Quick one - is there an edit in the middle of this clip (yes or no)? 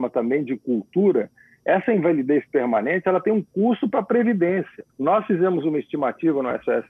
yes